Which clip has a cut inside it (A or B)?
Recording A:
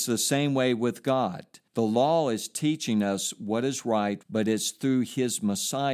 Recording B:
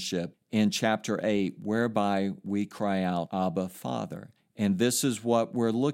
A